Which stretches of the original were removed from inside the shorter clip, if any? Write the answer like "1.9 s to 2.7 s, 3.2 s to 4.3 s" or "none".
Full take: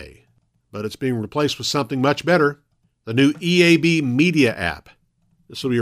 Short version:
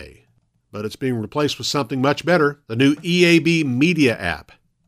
2.6 s to 3.0 s

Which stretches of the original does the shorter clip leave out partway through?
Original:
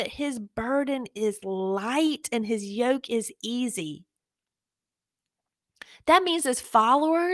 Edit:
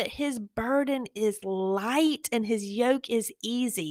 none

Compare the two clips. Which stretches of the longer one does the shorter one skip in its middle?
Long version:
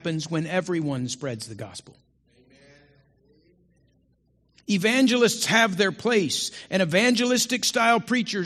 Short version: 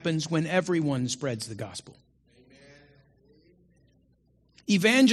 none

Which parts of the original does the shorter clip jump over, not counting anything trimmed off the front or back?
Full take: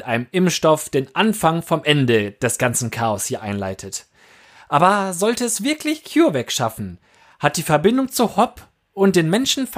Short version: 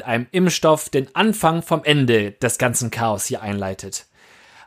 none

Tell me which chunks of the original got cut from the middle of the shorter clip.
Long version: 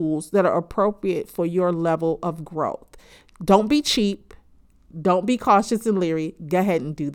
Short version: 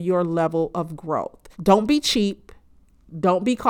3.0 s to 3.3 s

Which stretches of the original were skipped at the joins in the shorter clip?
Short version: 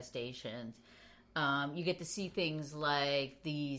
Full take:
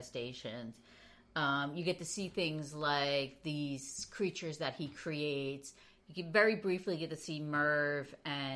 none

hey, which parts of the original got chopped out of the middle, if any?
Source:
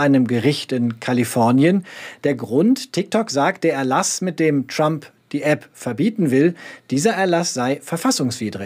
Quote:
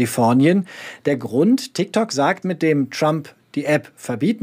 3.6 s to 4.2 s

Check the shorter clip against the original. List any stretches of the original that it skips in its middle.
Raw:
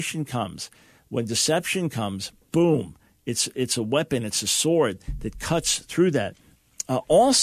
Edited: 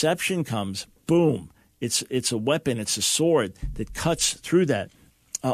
none

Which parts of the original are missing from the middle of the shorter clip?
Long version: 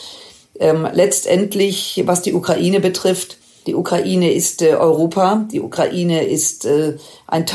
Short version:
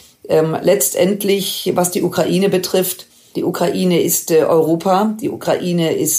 none

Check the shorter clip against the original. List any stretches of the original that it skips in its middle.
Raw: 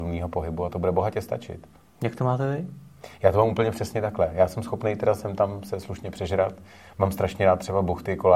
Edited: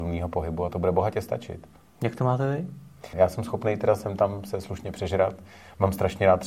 3.1 s to 4.3 s

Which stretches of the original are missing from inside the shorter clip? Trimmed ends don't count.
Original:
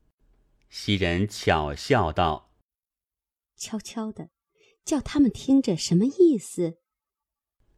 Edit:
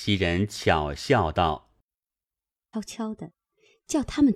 3.5 s to 3.7 s

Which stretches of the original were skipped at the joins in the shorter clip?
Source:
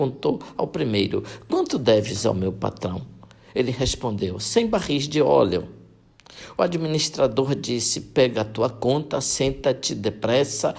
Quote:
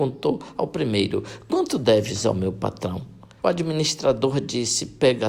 3.4 s to 6.5 s

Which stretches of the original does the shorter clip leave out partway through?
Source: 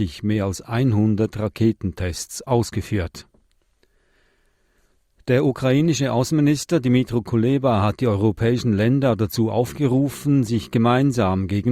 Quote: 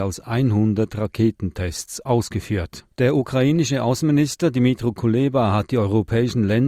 3.3 s to 5.2 s

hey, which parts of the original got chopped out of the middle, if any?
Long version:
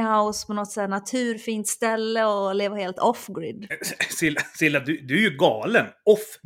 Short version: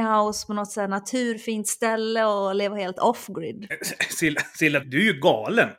4.8 s to 5.0 s

